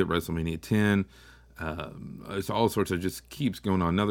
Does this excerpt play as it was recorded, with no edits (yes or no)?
yes